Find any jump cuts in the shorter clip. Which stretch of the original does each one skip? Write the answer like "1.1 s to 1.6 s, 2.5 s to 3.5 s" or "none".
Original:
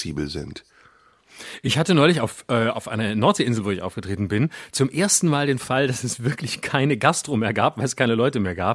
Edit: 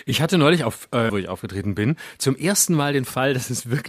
2.7 s to 3.6 s